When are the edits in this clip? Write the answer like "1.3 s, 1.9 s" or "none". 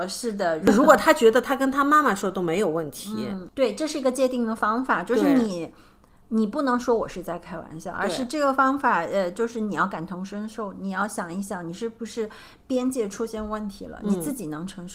none